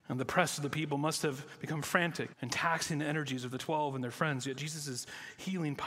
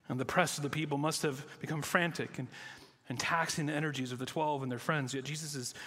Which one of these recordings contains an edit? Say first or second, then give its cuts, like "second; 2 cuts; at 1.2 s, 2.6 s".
first; 1 cut; at 2.3 s